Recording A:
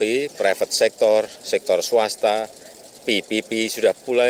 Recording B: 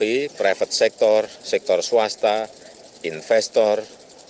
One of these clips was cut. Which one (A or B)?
A